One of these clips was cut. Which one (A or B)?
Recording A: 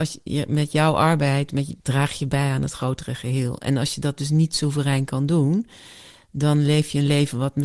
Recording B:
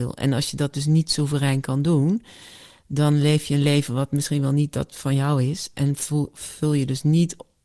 A